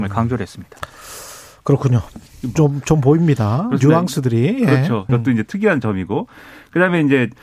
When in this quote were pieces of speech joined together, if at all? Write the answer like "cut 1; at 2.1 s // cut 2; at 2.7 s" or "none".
cut 1; at 2.6 s // cut 2; at 5.1 s